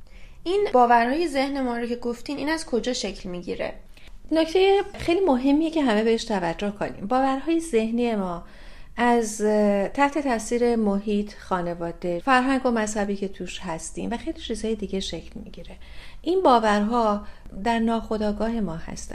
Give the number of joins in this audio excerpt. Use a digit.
1